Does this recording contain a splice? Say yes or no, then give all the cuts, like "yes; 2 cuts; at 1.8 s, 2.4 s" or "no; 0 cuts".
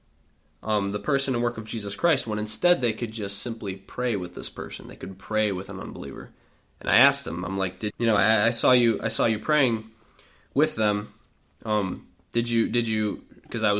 yes; 1 cut; at 7.9 s